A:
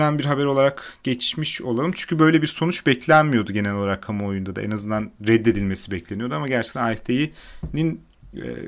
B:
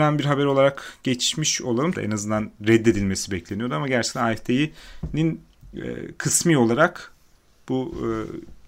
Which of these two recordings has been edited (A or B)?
B